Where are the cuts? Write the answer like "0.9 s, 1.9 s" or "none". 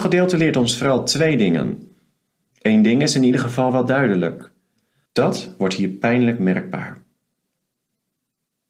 2.5 s, 5.1 s